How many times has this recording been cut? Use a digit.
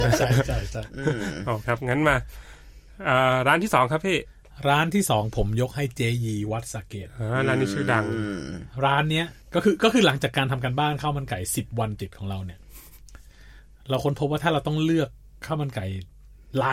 2